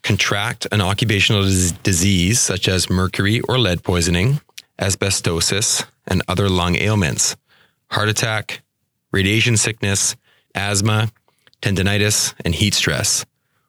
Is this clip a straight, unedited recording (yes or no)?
no